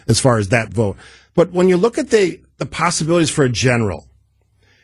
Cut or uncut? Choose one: uncut